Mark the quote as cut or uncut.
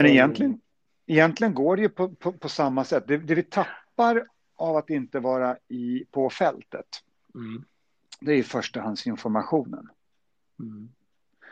uncut